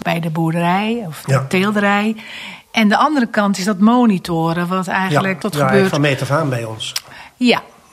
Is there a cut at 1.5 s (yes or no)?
no